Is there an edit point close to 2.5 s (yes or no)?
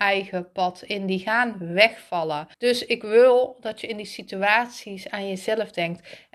yes